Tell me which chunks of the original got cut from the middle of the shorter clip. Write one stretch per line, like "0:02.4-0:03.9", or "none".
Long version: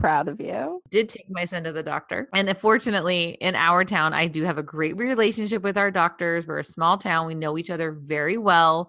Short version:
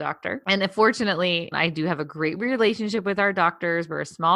0:03.4-0:04.1

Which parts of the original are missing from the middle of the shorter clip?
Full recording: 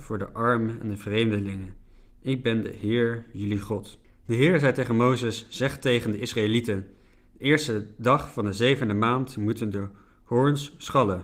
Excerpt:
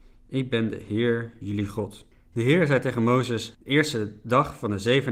0:05.5-0:07.3

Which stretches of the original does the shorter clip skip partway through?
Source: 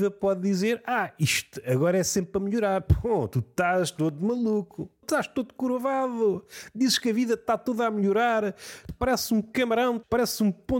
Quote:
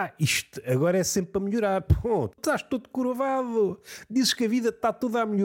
0:03.3-0:04.9

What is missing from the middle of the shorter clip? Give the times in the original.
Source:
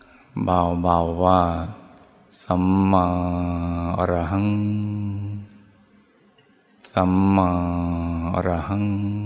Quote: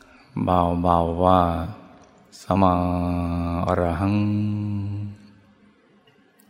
0:02.6-0:02.9

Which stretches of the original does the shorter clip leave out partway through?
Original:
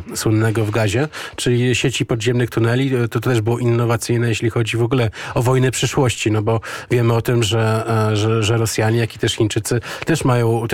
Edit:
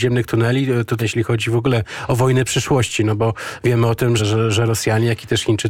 0:03.2-0:04.3
0:07.4-0:08.1

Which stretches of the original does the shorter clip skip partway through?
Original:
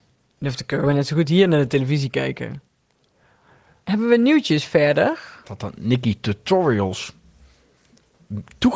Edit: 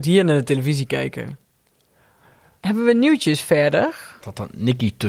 none

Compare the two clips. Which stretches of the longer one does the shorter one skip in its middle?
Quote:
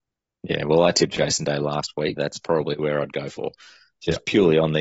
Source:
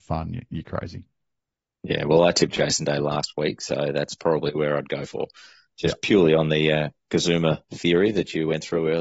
0:03.6-0:03.9

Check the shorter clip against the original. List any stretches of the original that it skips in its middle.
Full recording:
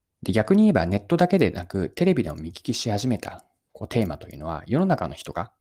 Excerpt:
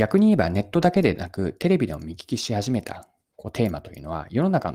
none

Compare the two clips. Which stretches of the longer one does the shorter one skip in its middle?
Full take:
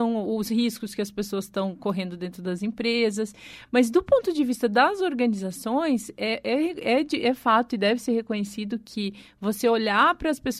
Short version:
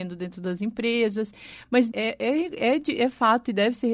0:03.9-0:06.2

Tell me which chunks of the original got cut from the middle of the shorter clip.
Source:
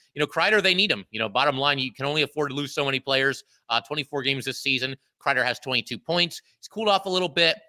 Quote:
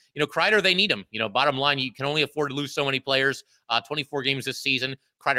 none

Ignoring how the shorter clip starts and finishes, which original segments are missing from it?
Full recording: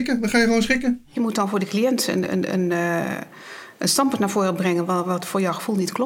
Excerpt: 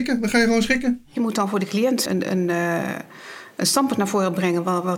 0:02.1-0:02.3

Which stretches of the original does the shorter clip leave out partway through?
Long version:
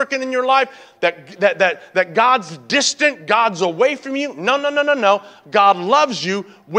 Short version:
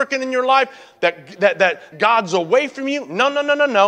0:01.9-0:03.2

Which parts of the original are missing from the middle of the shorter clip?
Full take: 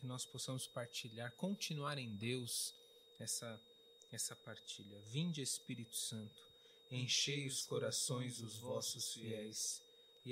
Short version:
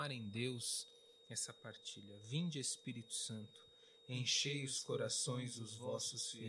0:03.1-0:04.1

